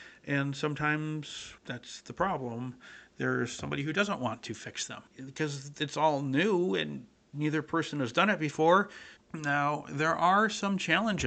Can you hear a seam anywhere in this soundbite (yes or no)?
yes